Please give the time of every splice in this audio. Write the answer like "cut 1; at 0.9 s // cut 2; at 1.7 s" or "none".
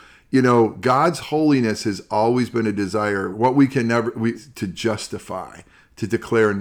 cut 1; at 3.3 s // cut 2; at 4.3 s

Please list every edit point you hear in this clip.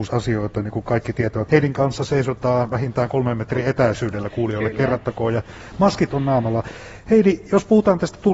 cut 1; at 1.5 s

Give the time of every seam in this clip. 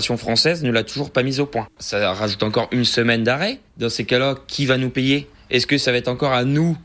cut 1; at 1.7 s

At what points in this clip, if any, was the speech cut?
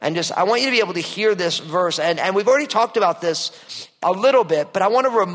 none

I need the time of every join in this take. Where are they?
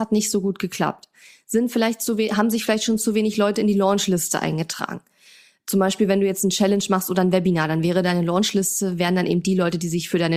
none

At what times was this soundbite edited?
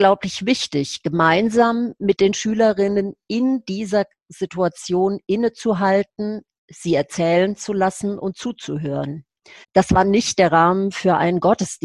cut 1; at 9.6 s

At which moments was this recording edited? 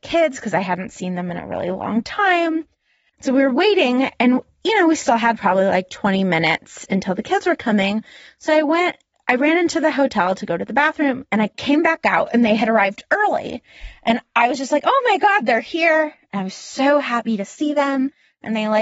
none

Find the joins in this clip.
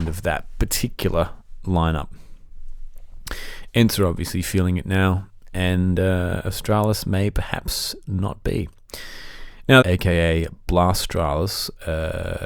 cut 1; at 9.8 s

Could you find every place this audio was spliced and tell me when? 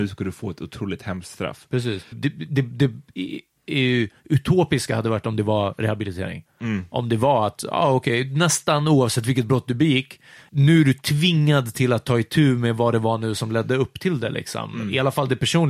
cut 1; at 2.1 s // cut 2; at 10.5 s

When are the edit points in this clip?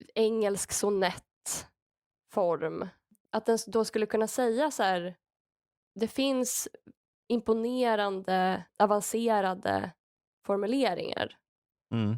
cut 1; at 3.2 s // cut 2; at 8.7 s

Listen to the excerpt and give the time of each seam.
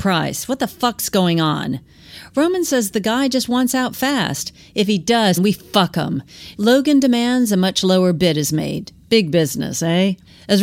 cut 1; at 5.4 s // cut 2; at 6.5 s

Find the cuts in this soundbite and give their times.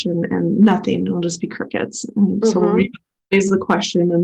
none

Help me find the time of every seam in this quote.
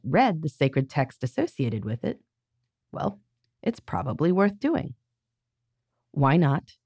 none

